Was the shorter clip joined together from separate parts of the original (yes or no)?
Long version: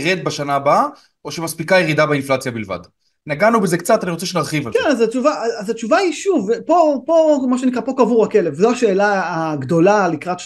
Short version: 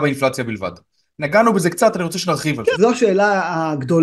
yes